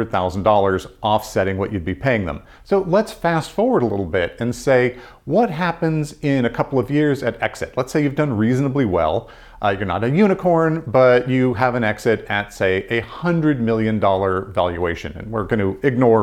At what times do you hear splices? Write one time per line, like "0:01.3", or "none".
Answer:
0:02.5